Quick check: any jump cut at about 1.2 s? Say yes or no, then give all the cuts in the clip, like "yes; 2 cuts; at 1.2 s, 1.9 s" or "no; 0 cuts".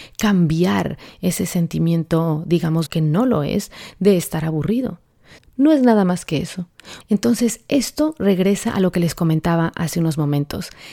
no; 3 cuts; at 2.9 s, 5.4 s, 7.0 s